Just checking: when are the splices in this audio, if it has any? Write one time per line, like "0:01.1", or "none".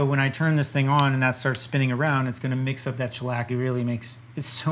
0:03.5